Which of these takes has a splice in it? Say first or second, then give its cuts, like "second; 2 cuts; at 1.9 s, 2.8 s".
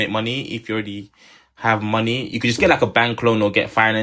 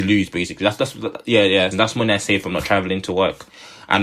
second; 1 cut; at 1.7 s